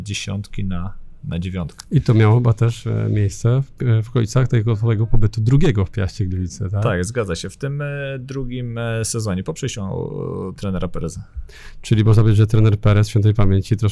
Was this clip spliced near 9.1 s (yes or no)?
no